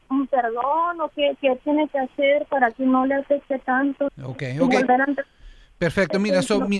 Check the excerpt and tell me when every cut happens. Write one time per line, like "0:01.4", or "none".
0:04.1